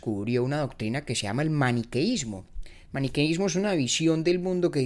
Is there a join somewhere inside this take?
no; 0 cuts

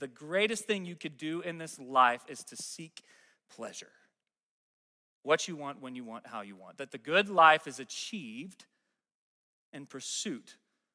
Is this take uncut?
yes; 0 cuts

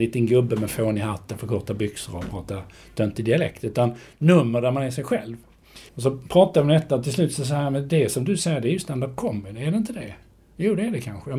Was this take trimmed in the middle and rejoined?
yes; 1 cut; at 5.9 s

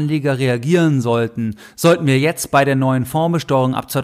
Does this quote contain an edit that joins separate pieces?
no; 0 cuts

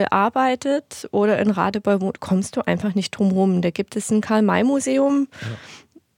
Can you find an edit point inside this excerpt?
no; 0 cuts

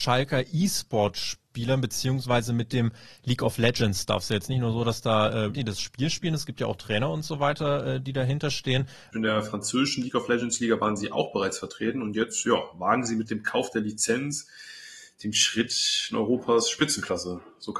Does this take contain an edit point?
yes; 2 cuts; at 5.5 s, 9.1 s

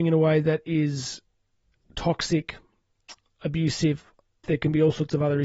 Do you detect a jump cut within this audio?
yes; 1 cut; at 4.4 s

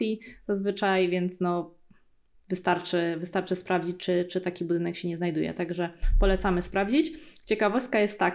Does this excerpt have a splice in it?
no; 0 cuts

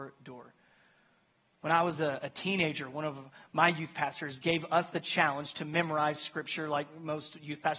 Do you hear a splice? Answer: no; 0 cuts

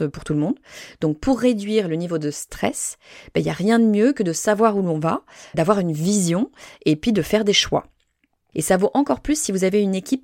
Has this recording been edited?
yes; 2 cuts; at 5.5 s, 8.5 s

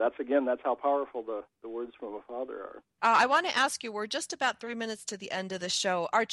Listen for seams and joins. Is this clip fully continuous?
no; 1 cut; at 3.0 s

